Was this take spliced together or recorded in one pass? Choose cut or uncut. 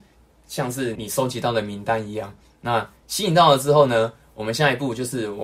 cut